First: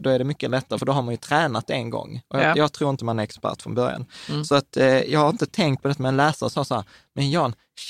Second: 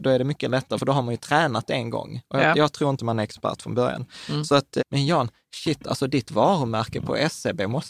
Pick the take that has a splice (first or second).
second